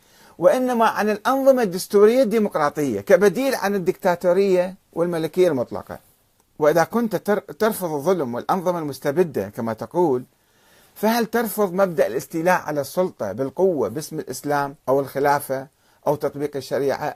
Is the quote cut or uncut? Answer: cut